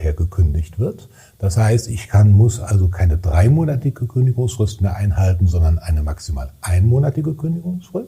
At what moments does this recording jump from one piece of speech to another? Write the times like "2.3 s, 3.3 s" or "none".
none